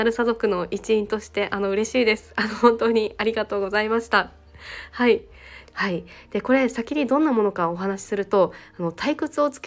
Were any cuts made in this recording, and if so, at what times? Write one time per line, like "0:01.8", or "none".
0:05.7